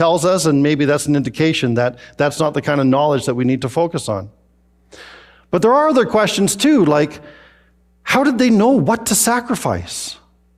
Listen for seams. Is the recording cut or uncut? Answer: uncut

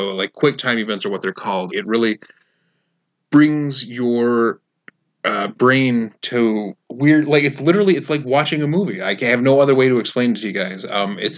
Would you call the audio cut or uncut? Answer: cut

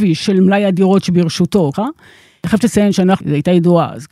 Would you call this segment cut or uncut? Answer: cut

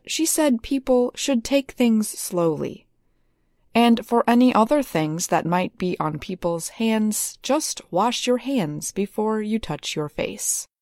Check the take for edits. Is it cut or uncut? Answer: cut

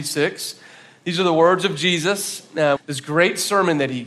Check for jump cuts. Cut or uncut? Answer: cut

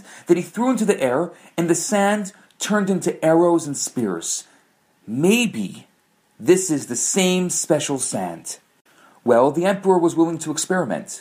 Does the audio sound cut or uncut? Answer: uncut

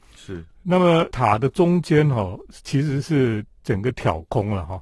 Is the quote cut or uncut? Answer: uncut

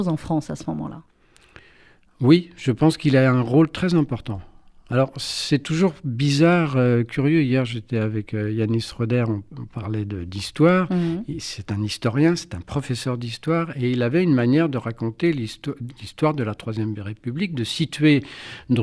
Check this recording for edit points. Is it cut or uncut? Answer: uncut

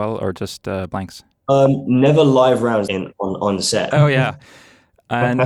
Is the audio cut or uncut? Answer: cut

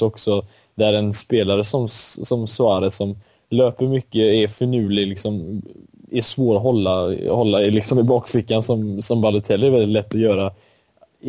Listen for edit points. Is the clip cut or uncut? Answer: uncut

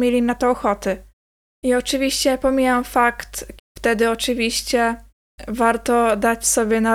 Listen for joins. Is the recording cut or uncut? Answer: cut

